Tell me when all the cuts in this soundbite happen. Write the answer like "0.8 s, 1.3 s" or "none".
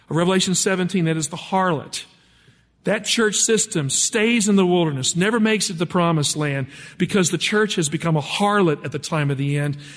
none